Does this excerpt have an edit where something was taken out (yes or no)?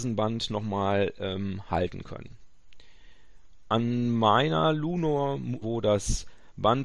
yes